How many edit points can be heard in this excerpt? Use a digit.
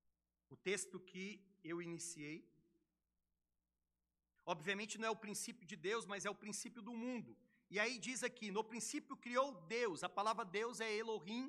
1